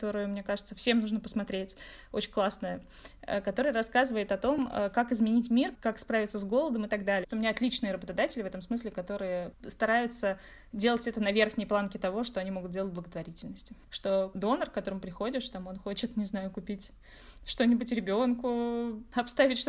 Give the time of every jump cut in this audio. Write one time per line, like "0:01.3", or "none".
0:07.2
0:13.8